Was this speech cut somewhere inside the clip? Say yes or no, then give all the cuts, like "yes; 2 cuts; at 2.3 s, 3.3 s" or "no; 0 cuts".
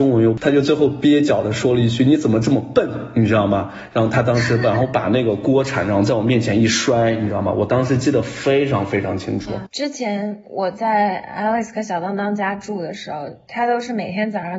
yes; 1 cut; at 9.6 s